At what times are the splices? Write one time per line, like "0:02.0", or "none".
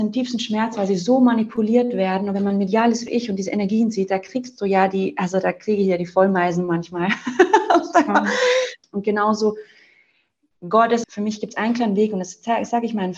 0:08.8
0:11.0